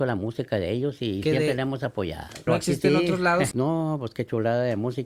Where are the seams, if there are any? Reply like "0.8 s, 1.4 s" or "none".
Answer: 2.5 s, 3.5 s